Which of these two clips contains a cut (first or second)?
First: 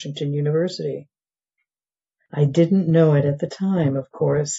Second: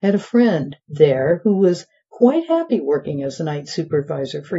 first